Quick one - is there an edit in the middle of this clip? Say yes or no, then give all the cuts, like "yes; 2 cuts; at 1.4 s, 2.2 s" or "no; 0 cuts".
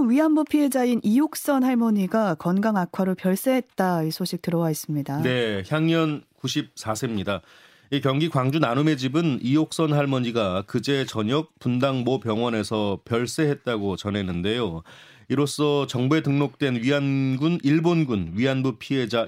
no; 0 cuts